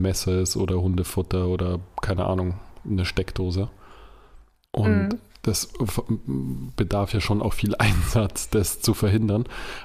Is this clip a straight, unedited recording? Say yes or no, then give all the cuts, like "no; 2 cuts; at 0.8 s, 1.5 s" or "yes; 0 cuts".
yes; 0 cuts